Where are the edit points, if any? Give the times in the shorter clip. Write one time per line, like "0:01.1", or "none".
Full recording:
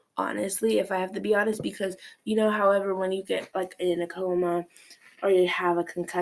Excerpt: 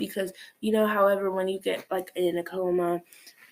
none